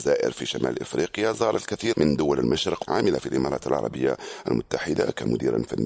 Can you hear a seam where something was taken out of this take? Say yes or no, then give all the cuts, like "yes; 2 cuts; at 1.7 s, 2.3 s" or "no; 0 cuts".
yes; 1 cut; at 1.9 s